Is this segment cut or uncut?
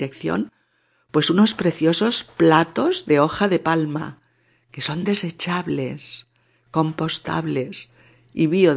uncut